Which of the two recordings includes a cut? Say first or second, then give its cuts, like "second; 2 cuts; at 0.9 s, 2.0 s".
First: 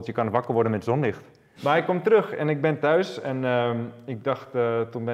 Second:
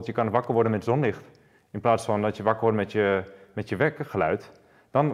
first; 1 cut; at 1.6 s